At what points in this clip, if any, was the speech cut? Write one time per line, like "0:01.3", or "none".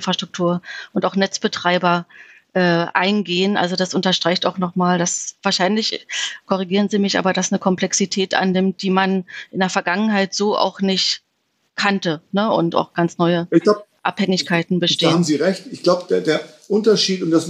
none

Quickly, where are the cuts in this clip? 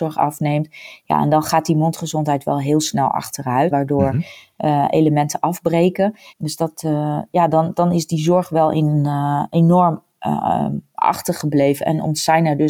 0:03.7
0:06.3

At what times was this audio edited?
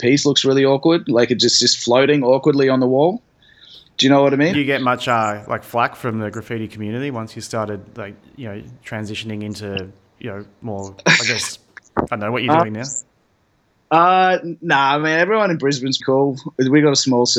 0:04.5
0:16.0

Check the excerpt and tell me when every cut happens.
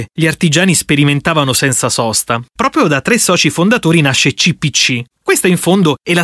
0:05.1

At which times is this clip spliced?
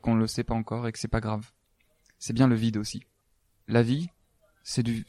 none

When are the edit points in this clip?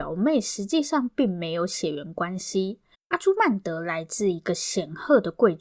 0:02.9

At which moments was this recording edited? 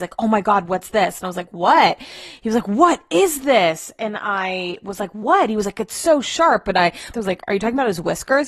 0:07.1

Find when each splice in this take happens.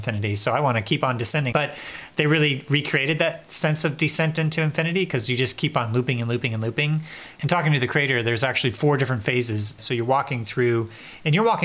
0:01.5
0:09.8

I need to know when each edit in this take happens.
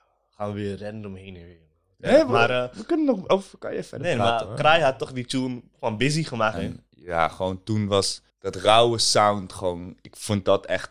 0:06.5
0:08.3

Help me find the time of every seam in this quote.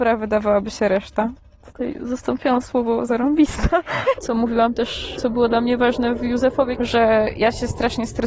0:04.2
0:05.2
0:06.8

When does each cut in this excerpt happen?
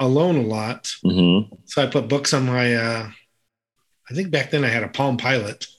0:01.0

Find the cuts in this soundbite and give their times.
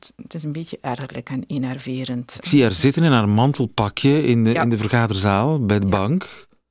none

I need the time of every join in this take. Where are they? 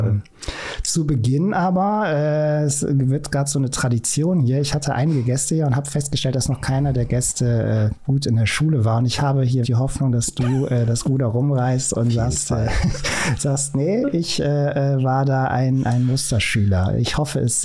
0:09.6

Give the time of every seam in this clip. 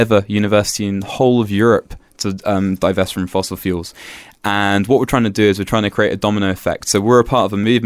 none

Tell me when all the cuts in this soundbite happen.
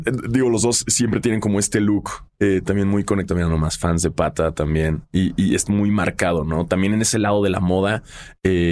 none

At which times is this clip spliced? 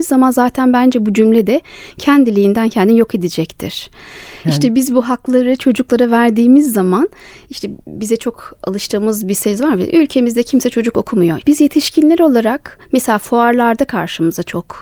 0:04.4
0:11.4

